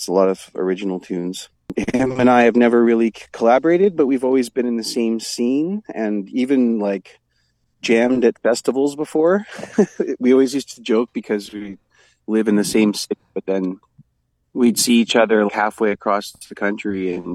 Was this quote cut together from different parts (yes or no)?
yes